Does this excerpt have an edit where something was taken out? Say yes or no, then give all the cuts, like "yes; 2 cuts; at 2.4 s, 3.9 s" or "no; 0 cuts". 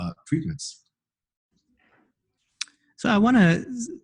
no; 0 cuts